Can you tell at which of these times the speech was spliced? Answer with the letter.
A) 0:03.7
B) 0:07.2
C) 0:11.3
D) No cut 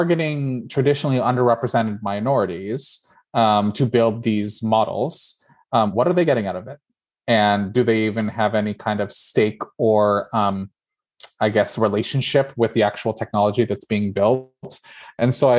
B